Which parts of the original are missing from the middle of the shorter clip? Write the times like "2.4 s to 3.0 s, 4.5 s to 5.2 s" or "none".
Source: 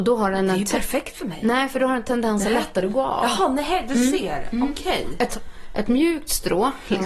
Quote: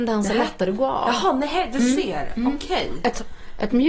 none

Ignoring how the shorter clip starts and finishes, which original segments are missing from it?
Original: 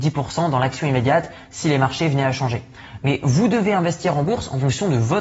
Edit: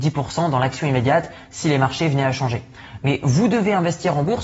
none

